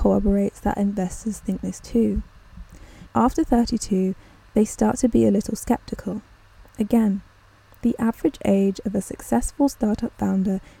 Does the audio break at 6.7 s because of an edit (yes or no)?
no